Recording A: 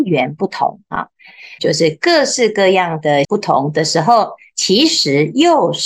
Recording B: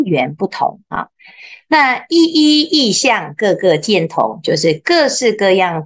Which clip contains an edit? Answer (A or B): A